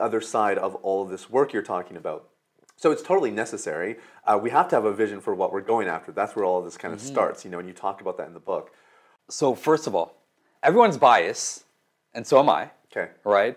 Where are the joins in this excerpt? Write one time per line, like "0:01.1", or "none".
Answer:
0:09.2
0:10.5